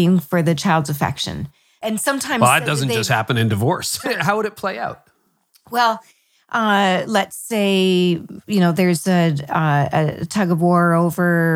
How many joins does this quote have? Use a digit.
1